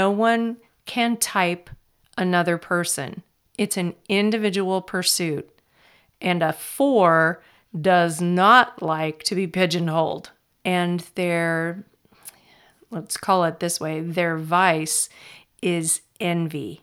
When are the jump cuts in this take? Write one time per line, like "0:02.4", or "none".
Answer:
0:10.5